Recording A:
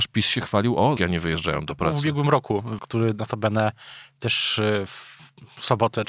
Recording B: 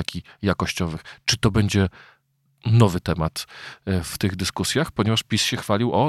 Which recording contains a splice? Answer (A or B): A